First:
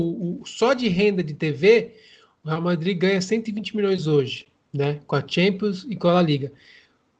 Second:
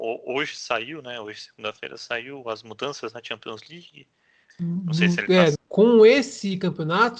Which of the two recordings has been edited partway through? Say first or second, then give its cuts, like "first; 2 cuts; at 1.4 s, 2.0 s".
second; 2 cuts; at 4.5 s, 5.5 s